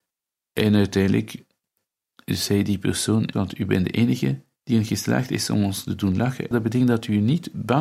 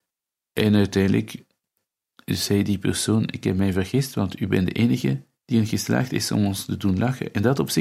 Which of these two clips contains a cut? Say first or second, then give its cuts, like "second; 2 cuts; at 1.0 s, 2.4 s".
first; 2 cuts; at 3.3 s, 6.5 s